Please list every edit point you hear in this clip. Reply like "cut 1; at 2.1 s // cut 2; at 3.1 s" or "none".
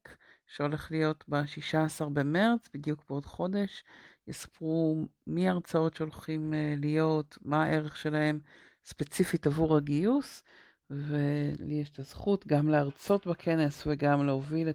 none